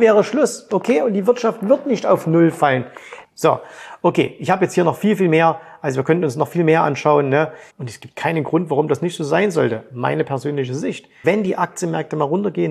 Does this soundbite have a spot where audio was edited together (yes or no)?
yes